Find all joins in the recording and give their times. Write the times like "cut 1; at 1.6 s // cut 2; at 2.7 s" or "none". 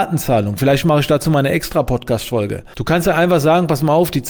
cut 1; at 2.7 s